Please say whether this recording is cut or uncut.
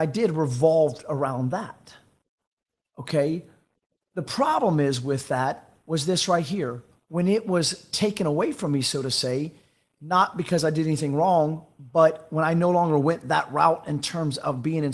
uncut